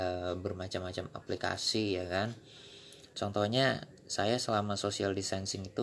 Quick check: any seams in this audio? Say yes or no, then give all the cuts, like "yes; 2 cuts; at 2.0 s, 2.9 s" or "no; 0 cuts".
yes; 1 cut; at 3.1 s